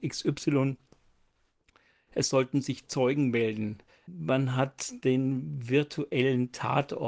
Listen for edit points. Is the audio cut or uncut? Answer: cut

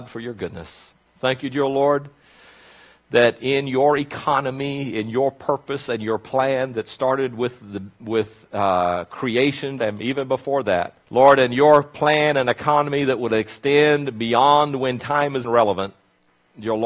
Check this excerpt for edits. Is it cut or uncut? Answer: cut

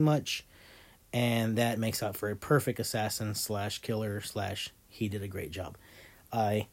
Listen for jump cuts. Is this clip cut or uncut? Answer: uncut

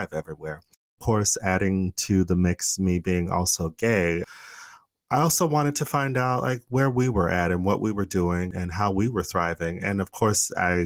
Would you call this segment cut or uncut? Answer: uncut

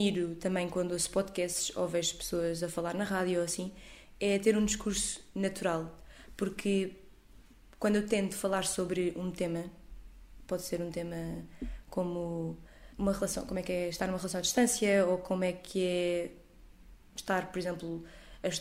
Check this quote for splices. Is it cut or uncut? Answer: cut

